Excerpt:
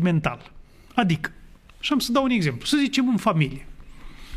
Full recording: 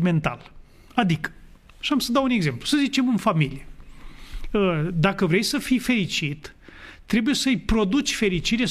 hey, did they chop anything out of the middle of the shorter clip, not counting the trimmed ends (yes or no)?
no